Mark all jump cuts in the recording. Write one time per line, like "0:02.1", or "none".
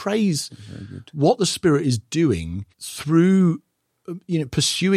0:02.7

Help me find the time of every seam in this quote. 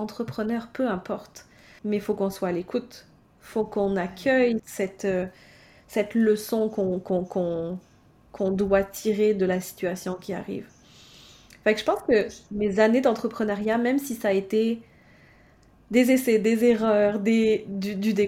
0:01.8
0:04.6

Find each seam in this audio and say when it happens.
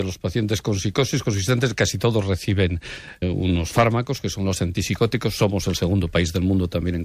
0:03.2

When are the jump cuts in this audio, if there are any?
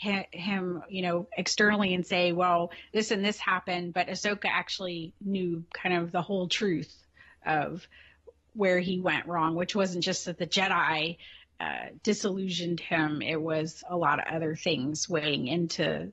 none

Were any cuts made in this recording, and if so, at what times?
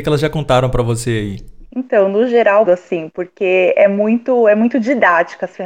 0:02.6

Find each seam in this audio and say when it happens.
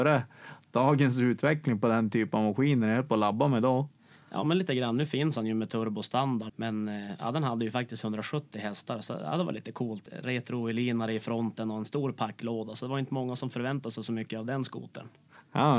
0:06.5

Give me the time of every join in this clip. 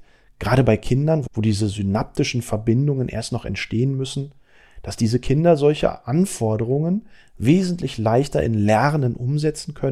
0:01.3

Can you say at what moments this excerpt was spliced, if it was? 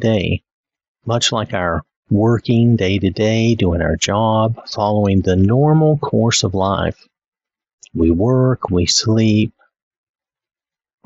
0:08.7

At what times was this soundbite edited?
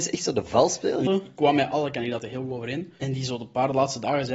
0:01.1

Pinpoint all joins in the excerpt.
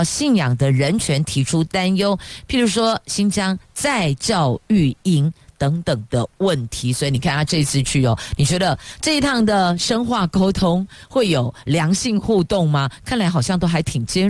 none

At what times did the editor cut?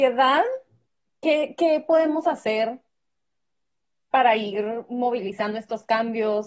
none

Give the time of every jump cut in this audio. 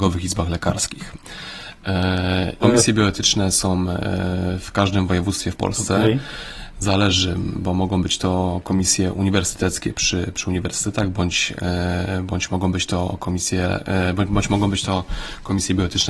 0:02.6

